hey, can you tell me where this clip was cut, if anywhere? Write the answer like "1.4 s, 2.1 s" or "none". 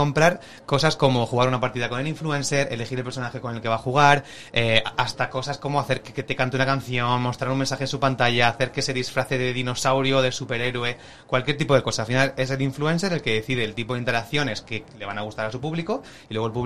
none